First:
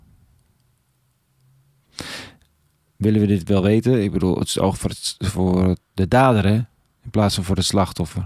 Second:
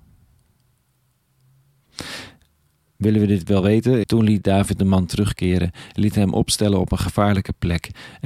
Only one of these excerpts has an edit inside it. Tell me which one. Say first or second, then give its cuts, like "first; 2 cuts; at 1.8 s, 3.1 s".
second; 1 cut; at 4.0 s